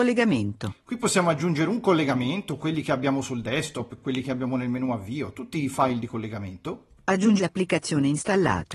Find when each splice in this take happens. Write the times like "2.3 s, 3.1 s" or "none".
none